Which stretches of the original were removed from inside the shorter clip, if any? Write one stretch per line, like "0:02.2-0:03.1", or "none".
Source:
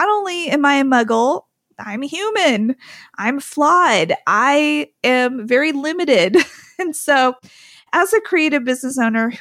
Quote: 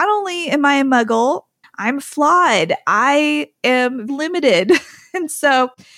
0:01.6-0:03.0
0:05.5-0:05.7